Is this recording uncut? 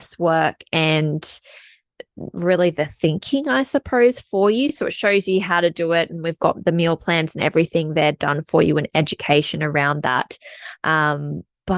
yes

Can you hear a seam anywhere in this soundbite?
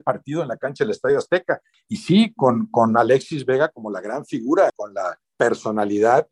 yes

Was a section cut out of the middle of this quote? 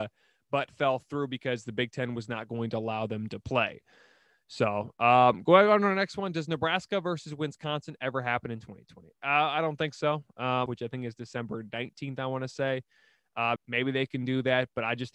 yes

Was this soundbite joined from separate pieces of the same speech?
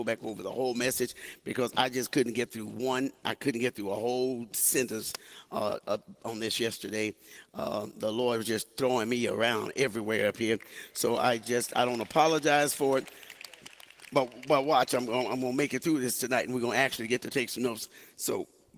no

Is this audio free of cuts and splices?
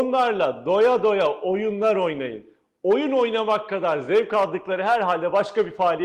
yes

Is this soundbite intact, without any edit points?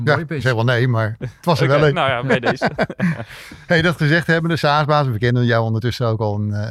yes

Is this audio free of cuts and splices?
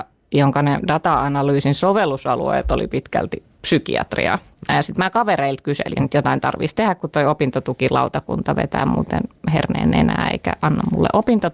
no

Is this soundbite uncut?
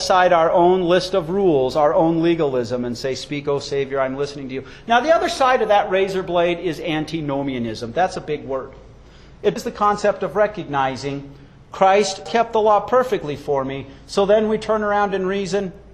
no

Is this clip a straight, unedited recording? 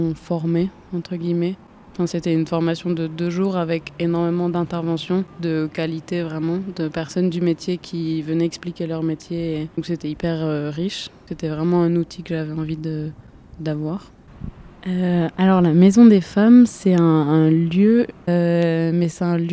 no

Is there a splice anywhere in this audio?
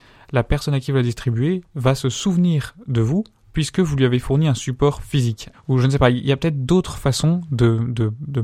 yes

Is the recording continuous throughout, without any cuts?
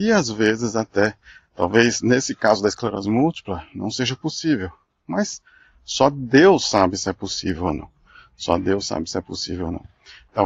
yes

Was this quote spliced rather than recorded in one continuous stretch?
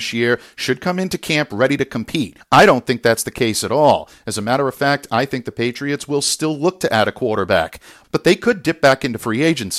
yes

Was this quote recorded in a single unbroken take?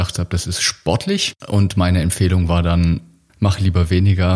no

